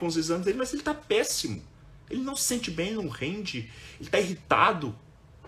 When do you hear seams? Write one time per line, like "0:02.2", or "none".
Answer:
none